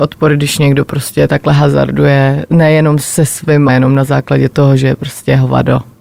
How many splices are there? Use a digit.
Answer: 1